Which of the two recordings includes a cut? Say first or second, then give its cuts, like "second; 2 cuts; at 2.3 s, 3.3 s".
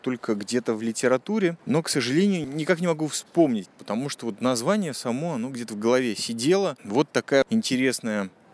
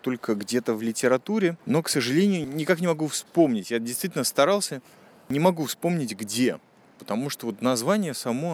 first; 2 cuts; at 3.6 s, 6.8 s